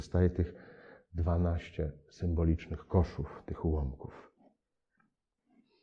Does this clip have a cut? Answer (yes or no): no